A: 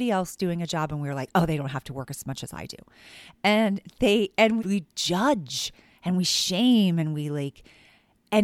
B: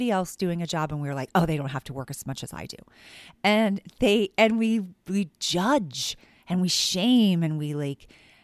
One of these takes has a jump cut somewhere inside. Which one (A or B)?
A